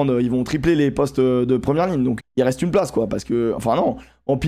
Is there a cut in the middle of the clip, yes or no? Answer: yes